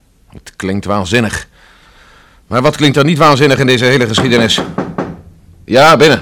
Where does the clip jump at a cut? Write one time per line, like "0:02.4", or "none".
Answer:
none

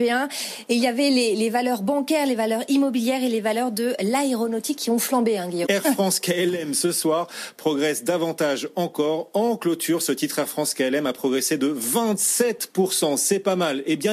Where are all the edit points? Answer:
0:05.6

